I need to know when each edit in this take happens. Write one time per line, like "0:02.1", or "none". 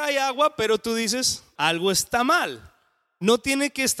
0:01.6